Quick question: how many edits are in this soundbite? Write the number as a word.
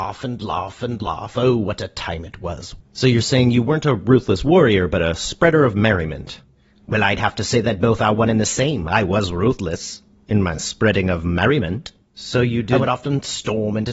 one